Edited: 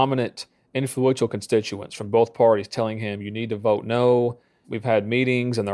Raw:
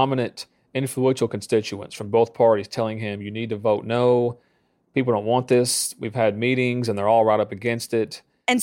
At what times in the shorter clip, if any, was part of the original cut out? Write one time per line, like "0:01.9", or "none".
0:04.6